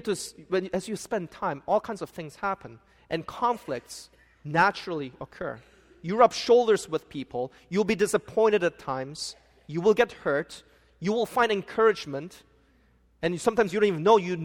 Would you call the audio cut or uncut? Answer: uncut